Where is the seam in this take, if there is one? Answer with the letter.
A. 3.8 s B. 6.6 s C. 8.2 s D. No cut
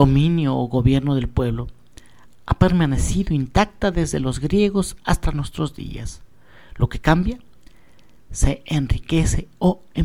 D